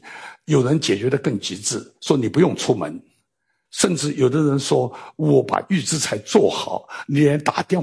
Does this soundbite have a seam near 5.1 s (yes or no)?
no